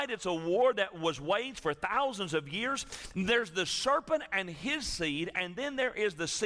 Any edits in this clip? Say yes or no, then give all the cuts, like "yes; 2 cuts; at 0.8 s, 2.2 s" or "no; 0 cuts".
yes; 1 cut; at 3.1 s